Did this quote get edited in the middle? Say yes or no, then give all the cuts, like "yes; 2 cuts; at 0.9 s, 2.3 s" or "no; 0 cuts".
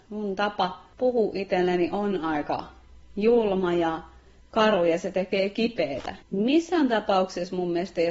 yes; 1 cut; at 6.2 s